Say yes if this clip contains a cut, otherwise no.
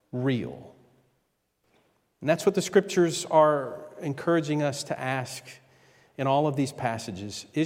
no